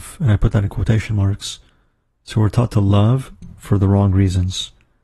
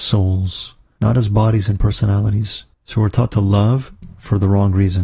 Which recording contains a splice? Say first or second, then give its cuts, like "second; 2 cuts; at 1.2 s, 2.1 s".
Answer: second; 1 cut; at 2.7 s